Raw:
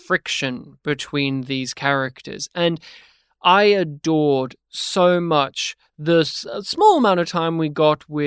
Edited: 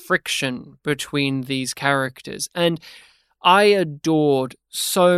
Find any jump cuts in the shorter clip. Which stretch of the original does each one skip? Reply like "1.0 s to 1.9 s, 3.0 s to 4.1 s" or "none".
none

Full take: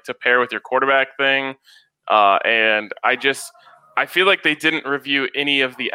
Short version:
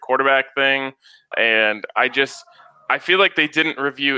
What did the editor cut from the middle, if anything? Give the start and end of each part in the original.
1.9 s to 2.4 s

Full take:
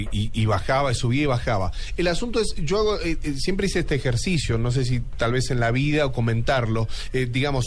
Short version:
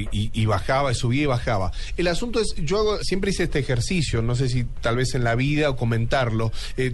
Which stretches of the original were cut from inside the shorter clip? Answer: 3.0 s to 3.4 s

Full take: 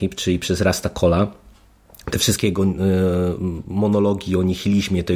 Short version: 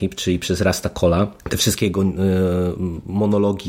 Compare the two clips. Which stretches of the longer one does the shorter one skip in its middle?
1.4 s to 2.0 s

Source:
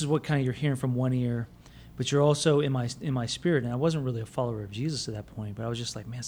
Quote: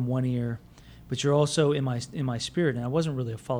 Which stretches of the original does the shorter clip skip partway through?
none

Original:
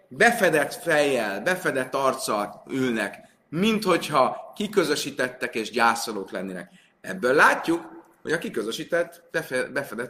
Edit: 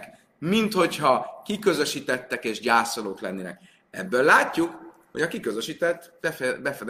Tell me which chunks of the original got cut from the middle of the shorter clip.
none

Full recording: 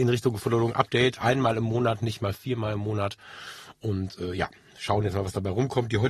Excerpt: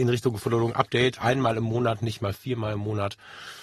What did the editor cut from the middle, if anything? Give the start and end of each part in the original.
none

